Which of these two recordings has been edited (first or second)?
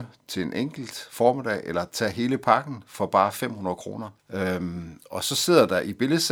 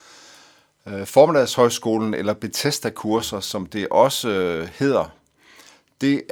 first